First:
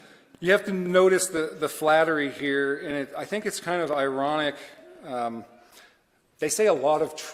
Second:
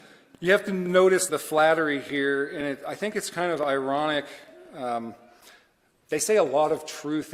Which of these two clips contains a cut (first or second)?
second